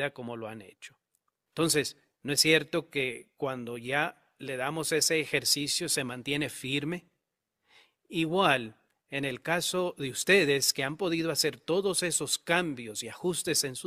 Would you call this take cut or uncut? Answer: cut